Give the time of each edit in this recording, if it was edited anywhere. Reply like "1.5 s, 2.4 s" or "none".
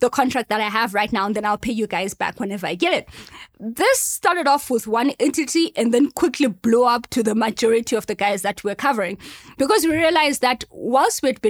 none